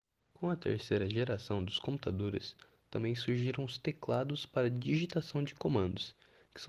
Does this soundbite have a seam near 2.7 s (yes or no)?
no